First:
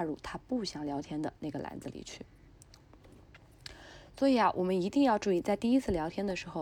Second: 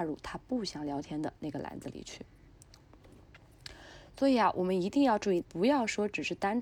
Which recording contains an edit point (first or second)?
second